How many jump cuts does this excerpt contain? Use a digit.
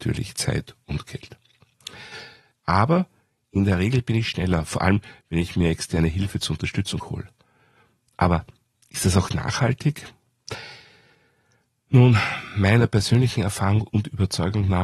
2